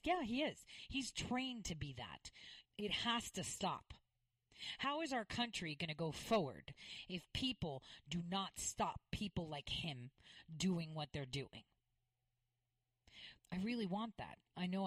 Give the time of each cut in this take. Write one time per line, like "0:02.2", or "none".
0:02.6
0:13.4